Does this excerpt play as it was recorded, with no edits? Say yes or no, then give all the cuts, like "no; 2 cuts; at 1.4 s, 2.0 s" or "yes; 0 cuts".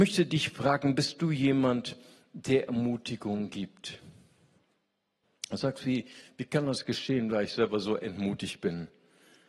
yes; 0 cuts